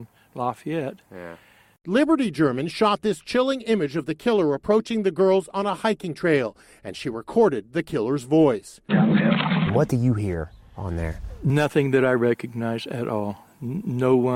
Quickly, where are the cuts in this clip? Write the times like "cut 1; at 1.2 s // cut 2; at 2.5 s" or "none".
cut 1; at 8.9 s